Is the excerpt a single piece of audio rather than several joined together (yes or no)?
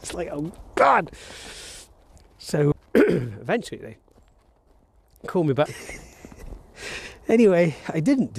no